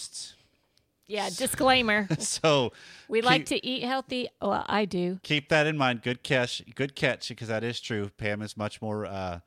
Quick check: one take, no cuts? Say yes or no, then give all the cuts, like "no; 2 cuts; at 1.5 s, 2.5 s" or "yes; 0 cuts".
yes; 0 cuts